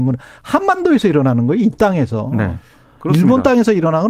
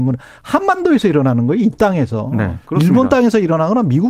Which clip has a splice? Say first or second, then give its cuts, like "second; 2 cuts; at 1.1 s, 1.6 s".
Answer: second; 1 cut; at 2.6 s